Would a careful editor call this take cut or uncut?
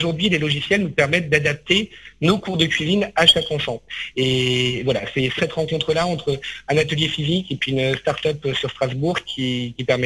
cut